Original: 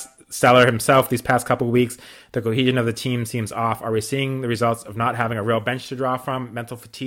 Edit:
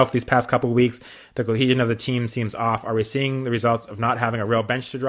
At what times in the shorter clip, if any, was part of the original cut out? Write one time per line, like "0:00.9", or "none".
none